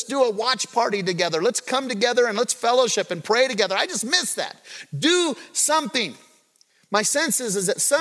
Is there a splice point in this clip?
no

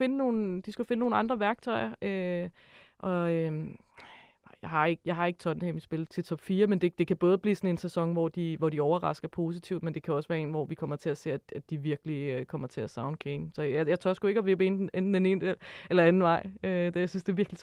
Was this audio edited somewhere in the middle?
yes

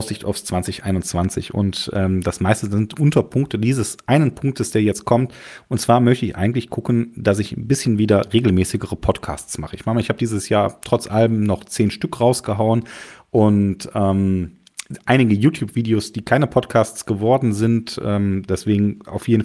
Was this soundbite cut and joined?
no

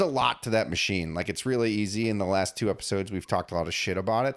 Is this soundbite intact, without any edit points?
yes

